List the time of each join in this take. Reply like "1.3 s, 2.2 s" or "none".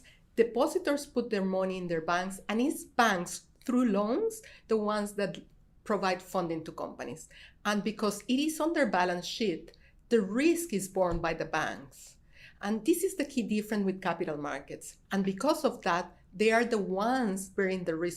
15.0 s